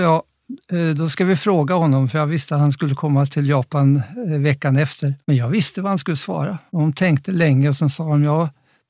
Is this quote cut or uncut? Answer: cut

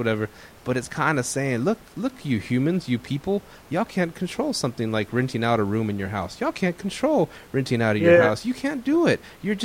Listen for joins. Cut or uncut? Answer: uncut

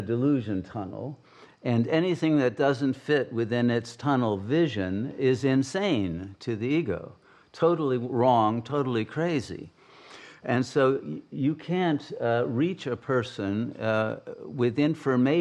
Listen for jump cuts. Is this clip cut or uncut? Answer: uncut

